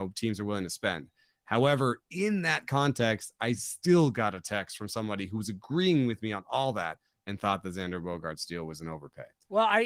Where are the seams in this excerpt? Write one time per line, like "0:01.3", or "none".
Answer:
none